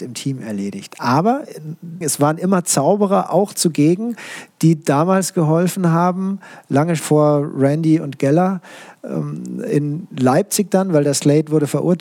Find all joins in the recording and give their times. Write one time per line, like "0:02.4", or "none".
0:02.0
0:07.0